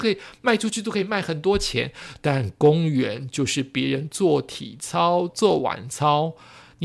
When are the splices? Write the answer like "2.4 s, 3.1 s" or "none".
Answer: 5.3 s

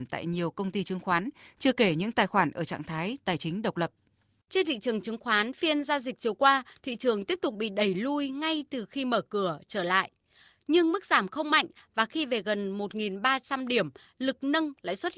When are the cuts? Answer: none

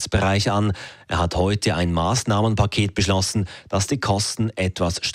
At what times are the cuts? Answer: none

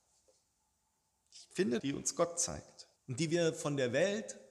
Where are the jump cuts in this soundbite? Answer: 1.8 s, 3.0 s

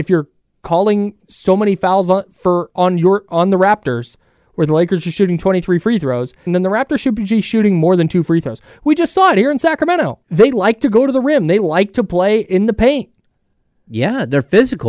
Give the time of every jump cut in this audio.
6.5 s, 10.2 s

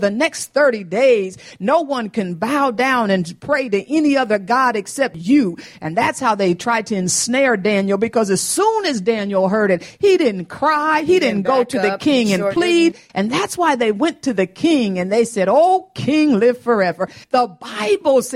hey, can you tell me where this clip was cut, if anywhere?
13.1 s, 17.2 s

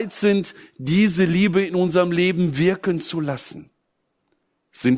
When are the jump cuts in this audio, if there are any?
none

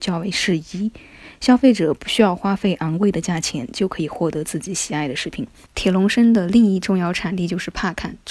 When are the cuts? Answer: 5.7 s

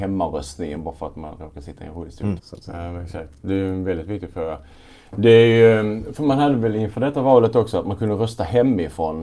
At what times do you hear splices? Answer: 2.4 s

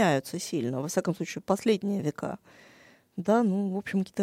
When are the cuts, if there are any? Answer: none

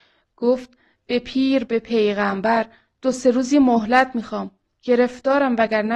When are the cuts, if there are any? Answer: none

